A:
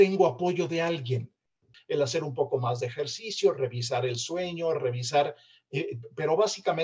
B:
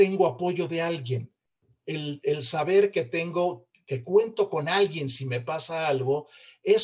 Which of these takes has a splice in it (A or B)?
A